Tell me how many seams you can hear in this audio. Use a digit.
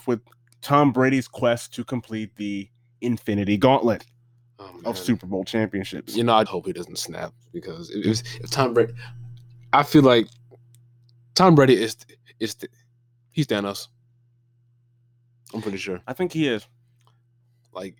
2